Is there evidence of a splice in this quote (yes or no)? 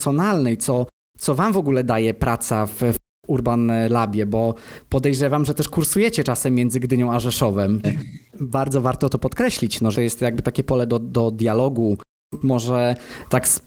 yes